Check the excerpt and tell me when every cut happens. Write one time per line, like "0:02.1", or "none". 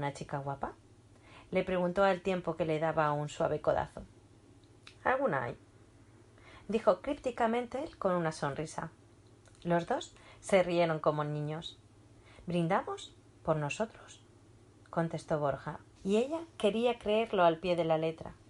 0:05.0
0:13.2
0:16.0